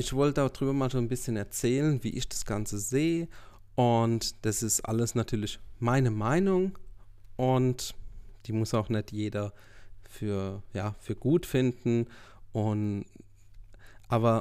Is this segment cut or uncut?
uncut